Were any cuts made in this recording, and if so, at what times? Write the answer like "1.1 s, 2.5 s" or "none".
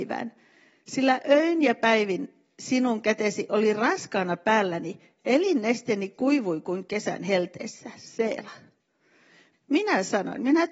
9.5 s